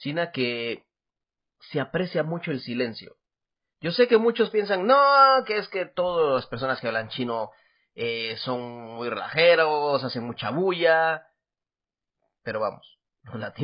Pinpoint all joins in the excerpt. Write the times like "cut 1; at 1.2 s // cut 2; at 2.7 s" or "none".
none